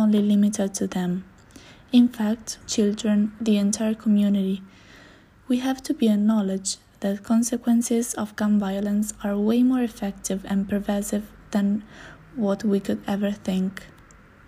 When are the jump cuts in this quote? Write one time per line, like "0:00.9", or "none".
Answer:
0:02.6